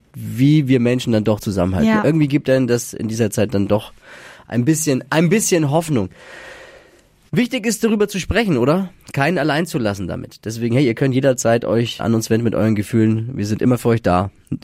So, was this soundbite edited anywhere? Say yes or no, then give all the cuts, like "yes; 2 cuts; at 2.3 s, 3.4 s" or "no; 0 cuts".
yes; 1 cut; at 12.0 s